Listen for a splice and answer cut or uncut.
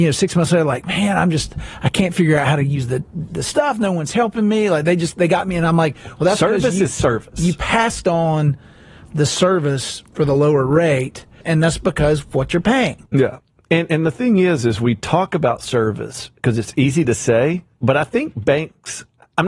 cut